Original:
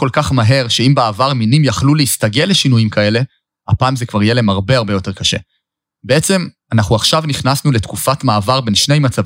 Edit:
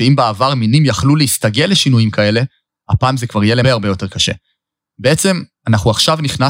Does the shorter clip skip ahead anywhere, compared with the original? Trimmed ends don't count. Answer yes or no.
yes